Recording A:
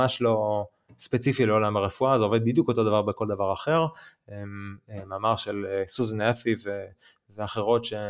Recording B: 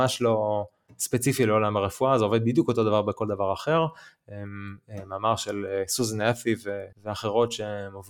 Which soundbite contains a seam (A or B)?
B